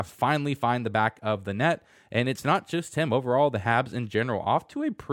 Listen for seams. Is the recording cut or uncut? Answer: uncut